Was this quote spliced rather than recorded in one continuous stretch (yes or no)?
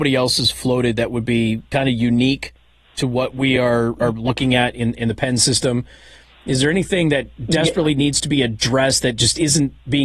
no